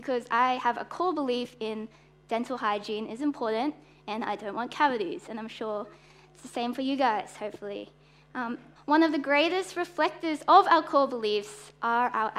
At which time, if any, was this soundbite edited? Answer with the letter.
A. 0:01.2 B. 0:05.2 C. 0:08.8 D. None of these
C